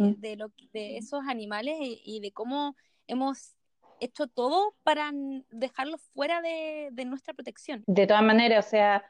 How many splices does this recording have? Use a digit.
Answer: 1